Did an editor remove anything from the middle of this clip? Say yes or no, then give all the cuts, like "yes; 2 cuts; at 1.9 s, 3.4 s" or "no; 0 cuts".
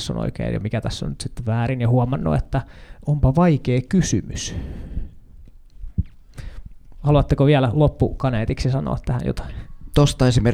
no; 0 cuts